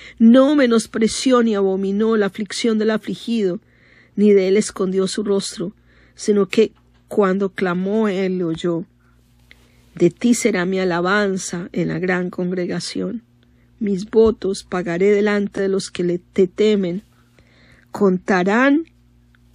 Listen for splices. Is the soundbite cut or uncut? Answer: uncut